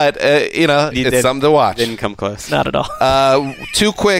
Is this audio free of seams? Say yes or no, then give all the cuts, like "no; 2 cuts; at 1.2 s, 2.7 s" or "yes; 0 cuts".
no; 1 cut; at 0.9 s